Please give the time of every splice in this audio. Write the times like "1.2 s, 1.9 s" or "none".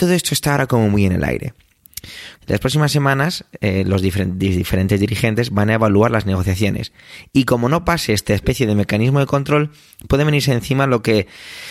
2.4 s